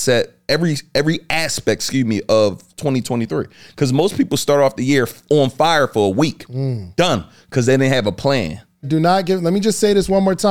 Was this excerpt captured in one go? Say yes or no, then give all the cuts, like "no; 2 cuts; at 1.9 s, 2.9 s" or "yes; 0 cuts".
no; 1 cut; at 8.8 s